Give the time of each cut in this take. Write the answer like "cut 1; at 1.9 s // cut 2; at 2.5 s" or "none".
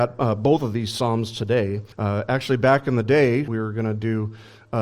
cut 1; at 1.9 s // cut 2; at 3.5 s